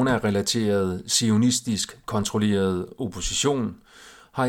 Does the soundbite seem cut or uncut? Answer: uncut